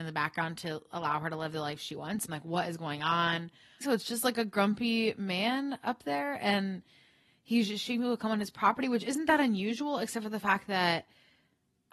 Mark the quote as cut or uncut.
cut